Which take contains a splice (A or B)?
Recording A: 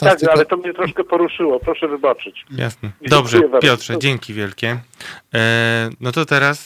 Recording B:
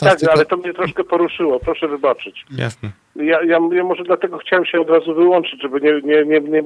A